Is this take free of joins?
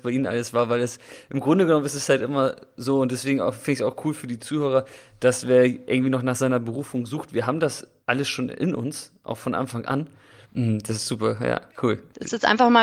no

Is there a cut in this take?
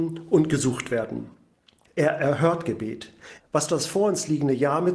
yes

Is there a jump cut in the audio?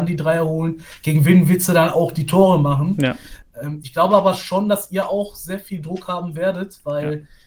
no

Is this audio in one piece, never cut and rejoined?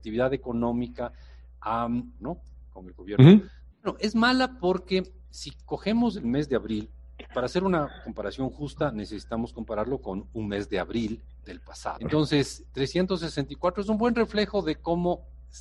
no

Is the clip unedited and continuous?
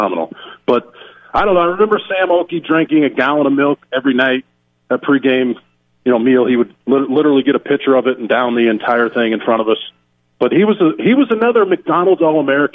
yes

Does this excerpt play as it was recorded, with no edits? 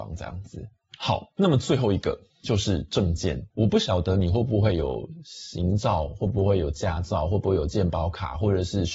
no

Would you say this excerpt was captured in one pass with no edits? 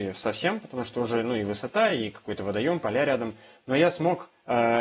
yes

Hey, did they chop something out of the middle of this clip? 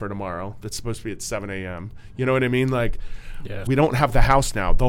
yes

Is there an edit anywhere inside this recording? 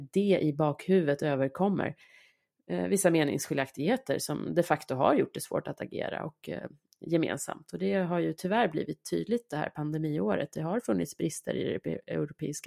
no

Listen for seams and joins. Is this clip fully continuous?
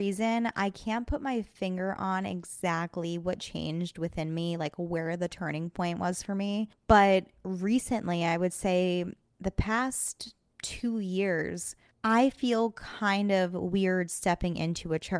yes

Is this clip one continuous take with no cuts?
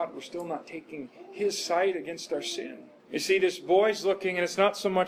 no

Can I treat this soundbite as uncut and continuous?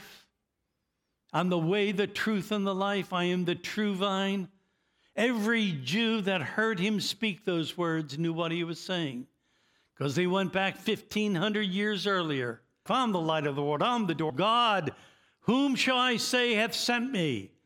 no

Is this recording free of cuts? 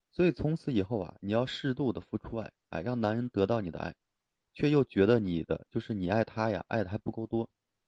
yes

